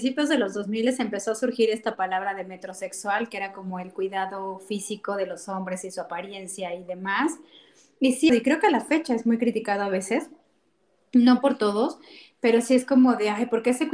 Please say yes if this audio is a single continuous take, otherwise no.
no